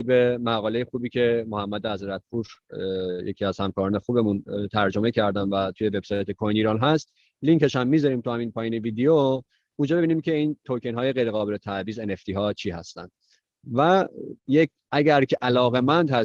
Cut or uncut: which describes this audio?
cut